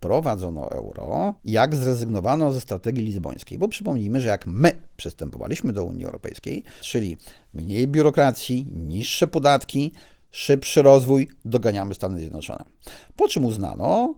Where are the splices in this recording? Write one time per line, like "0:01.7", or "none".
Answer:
0:01.4
0:06.8